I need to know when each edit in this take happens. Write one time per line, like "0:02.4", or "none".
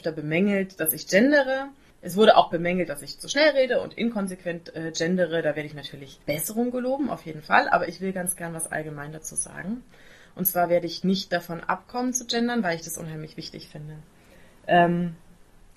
0:06.2